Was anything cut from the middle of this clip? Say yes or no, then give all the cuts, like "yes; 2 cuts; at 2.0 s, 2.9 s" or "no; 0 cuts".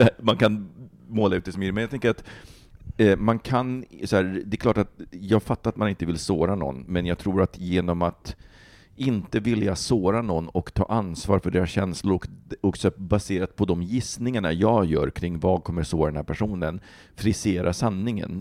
no; 0 cuts